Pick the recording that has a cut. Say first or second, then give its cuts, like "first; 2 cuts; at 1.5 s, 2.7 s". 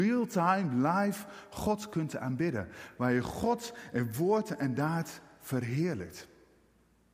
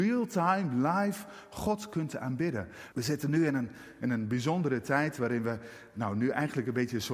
second; 1 cut; at 2.9 s